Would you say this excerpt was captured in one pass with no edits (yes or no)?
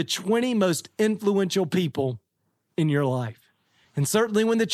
no